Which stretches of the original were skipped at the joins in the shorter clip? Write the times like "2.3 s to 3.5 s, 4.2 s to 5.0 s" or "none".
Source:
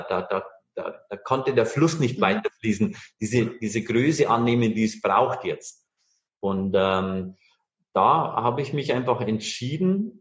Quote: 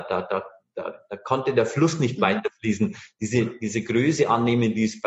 none